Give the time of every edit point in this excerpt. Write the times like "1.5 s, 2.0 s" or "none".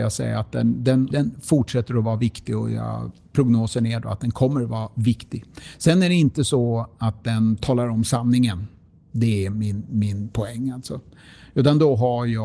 1.1 s